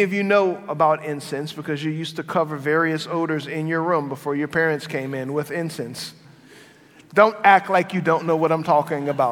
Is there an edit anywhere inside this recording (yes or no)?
no